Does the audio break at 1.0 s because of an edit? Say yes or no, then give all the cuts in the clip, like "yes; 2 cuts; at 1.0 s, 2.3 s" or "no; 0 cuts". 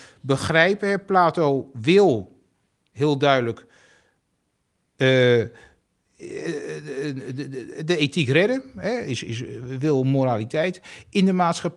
no; 0 cuts